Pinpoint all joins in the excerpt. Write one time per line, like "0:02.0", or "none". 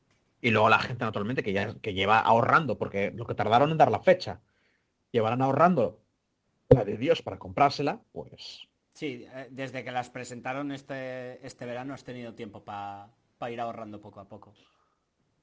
none